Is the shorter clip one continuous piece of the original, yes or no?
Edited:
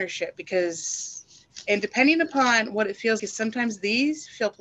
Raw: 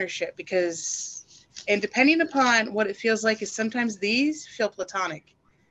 no